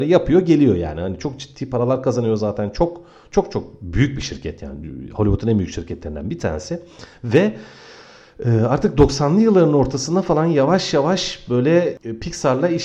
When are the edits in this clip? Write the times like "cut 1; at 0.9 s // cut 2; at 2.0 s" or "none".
none